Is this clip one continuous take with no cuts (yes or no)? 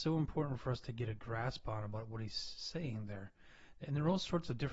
yes